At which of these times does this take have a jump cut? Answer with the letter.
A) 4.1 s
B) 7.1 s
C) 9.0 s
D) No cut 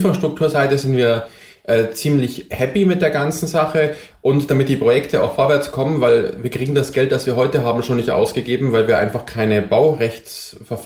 A